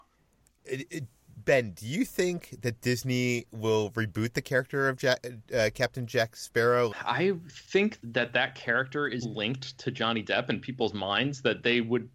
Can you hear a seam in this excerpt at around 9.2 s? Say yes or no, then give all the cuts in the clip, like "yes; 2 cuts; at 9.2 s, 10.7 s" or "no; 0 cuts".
yes; 3 cuts; at 6.9 s, 8.0 s, 9.2 s